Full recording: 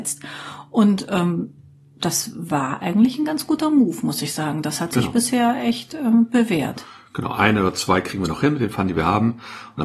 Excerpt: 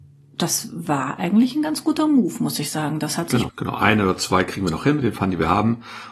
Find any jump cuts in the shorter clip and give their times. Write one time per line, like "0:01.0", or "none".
0:03.5